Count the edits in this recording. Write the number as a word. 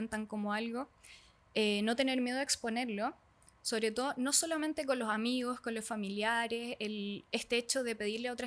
zero